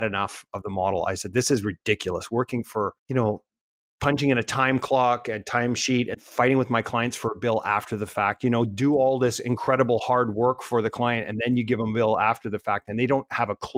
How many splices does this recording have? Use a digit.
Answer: 2